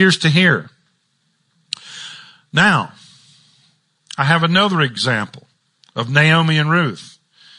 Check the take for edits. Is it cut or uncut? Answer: uncut